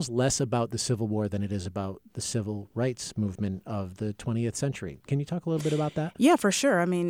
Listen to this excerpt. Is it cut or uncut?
uncut